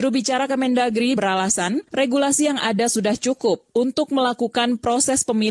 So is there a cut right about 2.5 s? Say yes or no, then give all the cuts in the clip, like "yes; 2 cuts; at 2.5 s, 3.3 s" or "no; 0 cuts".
no; 1 cut; at 1.2 s